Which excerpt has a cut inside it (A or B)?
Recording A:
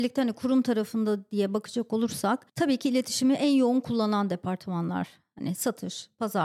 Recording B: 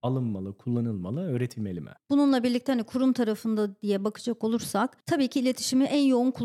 B